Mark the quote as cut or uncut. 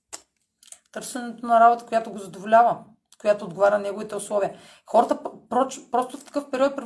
uncut